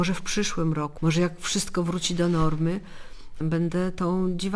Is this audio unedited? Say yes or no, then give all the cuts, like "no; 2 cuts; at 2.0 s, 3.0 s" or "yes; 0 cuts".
no; 2 cuts; at 1.0 s, 3.4 s